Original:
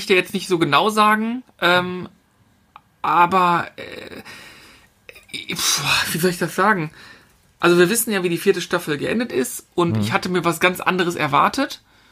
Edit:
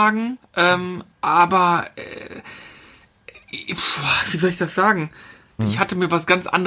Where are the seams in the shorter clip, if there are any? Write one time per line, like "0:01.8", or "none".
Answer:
0:01.1
0:05.6